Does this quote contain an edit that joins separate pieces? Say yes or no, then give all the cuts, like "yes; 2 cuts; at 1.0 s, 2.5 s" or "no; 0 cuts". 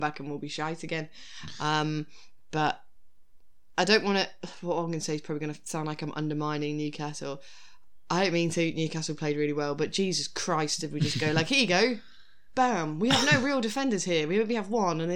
no; 0 cuts